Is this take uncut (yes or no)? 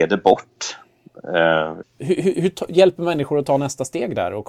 no